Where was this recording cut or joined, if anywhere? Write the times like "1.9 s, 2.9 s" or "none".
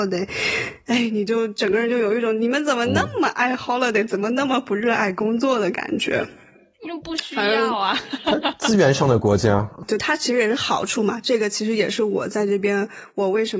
none